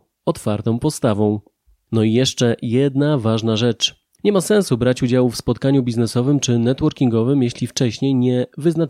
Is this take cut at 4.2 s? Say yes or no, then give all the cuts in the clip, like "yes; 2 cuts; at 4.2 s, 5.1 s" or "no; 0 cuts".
yes; 1 cut; at 4.2 s